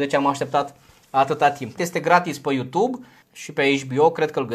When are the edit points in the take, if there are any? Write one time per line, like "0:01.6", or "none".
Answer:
0:01.8
0:03.2